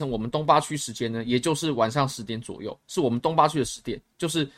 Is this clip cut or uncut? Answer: uncut